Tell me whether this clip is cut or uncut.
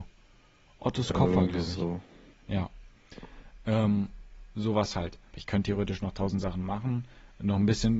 cut